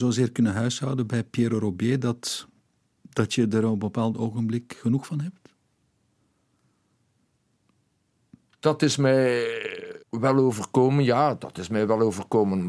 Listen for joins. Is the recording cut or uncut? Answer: cut